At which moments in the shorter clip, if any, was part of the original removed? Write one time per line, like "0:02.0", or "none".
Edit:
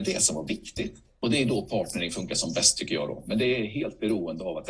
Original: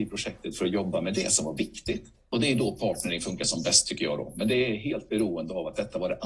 none